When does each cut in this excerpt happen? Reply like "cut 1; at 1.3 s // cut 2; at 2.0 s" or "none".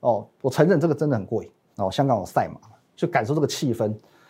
cut 1; at 1.7 s